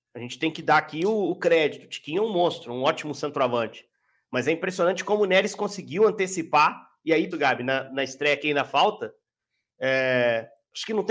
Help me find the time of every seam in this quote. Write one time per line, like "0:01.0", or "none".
0:07.3